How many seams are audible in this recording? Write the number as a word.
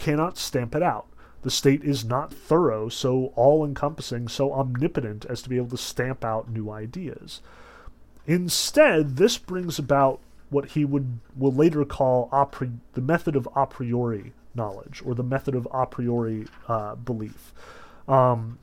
one